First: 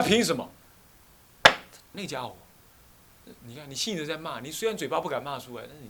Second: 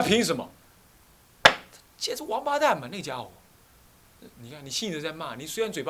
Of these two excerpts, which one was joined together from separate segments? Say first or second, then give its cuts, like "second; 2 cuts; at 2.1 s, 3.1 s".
first; 1 cut; at 1.9 s